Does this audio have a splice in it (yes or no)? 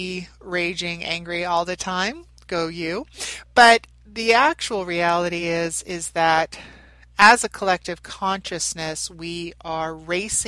no